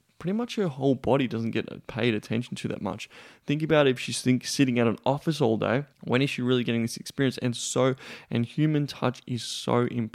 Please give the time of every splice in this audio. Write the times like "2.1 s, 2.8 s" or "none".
5.9 s